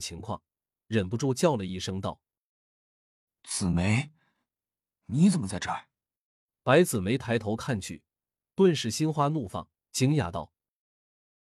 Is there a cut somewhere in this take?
no; 0 cuts

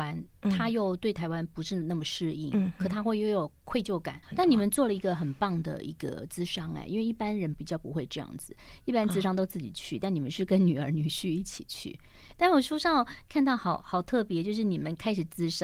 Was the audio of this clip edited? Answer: yes; 1 cut; at 4.2 s

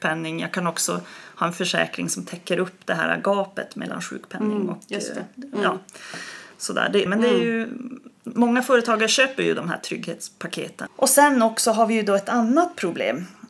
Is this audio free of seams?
no; 2 cuts; at 7.1 s, 10.9 s

